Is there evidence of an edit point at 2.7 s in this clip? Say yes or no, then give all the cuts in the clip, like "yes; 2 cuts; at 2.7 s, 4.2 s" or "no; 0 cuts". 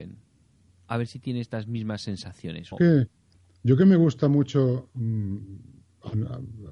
yes; 1 cut; at 2.7 s